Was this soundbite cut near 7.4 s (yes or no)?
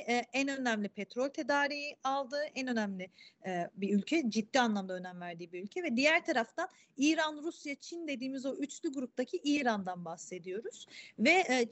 no